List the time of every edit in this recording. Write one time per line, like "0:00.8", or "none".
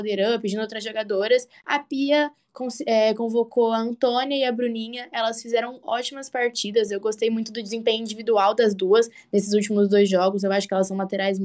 none